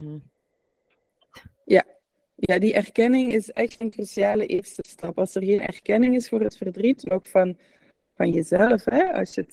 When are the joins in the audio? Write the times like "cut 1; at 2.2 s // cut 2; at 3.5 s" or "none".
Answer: cut 1; at 1.3 s